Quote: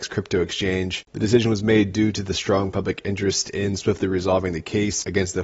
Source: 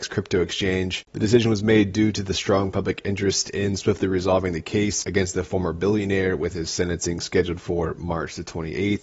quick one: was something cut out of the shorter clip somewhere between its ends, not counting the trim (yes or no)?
no